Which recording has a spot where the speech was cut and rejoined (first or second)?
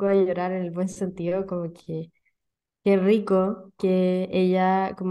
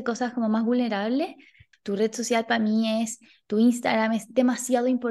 second